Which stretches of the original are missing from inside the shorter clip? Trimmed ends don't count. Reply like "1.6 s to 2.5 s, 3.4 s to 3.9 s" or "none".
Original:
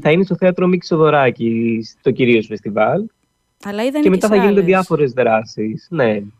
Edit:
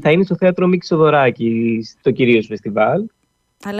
none